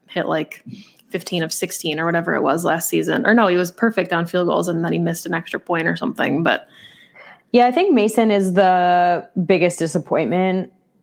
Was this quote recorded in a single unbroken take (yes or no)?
yes